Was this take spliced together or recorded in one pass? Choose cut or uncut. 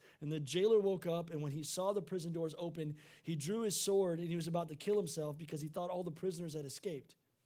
uncut